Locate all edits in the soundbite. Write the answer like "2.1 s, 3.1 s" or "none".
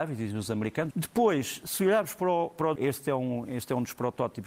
0.9 s, 2.8 s